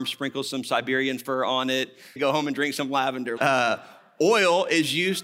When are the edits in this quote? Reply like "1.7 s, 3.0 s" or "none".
2.2 s, 3.4 s